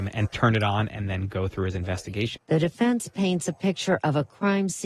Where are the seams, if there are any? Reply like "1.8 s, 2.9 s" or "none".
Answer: 2.4 s